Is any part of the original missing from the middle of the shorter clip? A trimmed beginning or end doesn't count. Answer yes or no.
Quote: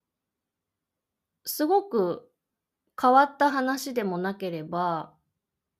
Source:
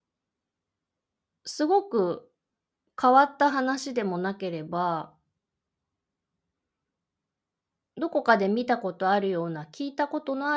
no